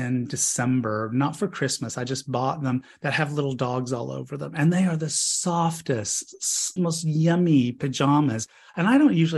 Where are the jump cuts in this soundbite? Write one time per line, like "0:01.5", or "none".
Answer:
0:06.8